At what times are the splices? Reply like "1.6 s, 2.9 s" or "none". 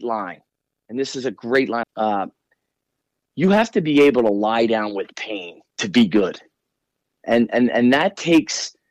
1.8 s, 5.7 s

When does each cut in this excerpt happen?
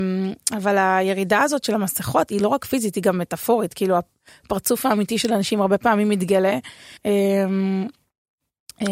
2.4 s, 7.0 s

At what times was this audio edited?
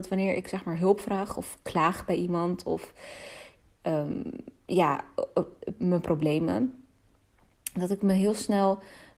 5.8 s

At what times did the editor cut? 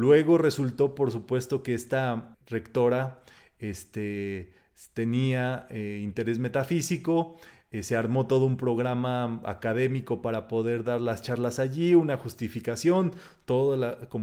2.3 s

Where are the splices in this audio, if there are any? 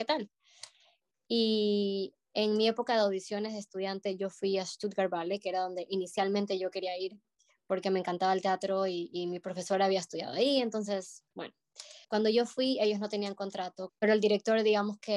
1.1 s, 12.0 s, 13.9 s

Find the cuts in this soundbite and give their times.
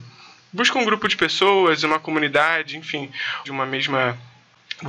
3.4 s

